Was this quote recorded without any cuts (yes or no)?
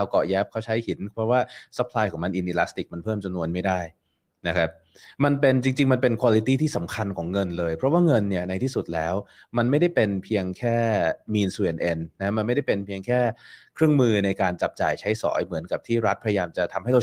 yes